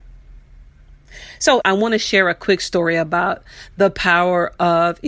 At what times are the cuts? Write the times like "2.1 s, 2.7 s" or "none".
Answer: 1.6 s